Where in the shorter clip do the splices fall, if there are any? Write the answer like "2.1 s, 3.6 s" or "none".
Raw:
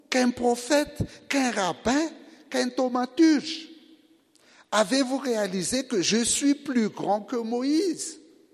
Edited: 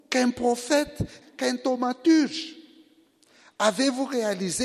1.2 s